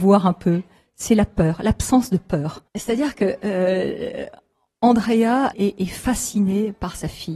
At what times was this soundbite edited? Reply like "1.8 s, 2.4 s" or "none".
2.7 s, 5.5 s